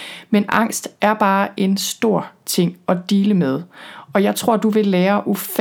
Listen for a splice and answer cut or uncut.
uncut